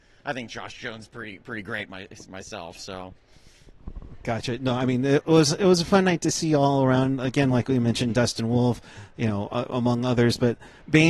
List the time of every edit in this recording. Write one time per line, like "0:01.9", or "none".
none